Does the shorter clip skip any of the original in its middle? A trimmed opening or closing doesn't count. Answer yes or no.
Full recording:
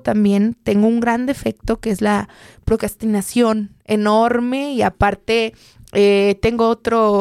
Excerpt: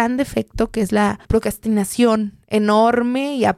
yes